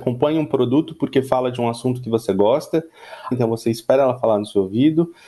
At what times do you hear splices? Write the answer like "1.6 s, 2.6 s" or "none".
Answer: 3.3 s